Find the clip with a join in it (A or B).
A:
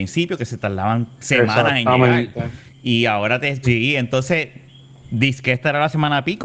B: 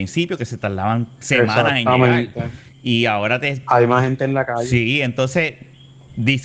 A